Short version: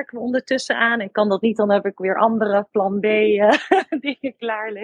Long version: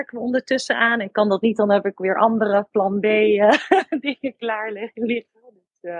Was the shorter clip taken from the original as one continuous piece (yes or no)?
yes